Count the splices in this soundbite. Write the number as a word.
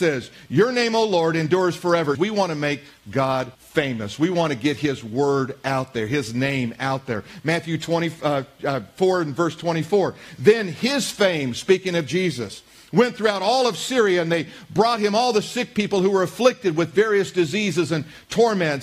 two